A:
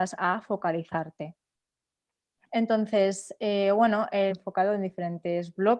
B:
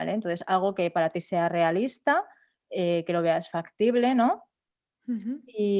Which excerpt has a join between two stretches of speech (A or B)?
A